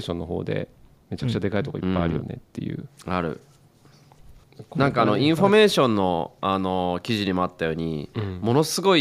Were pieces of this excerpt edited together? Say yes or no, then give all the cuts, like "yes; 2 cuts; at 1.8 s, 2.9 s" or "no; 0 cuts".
yes; 1 cut; at 4.4 s